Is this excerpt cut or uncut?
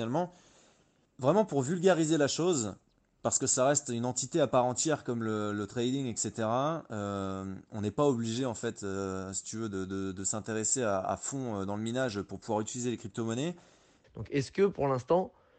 cut